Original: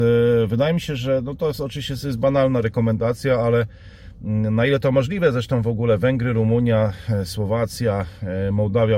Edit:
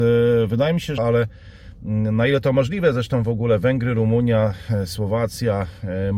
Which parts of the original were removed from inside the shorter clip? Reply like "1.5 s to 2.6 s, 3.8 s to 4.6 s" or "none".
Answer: 1.0 s to 3.4 s